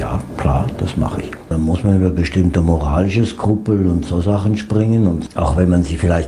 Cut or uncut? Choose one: uncut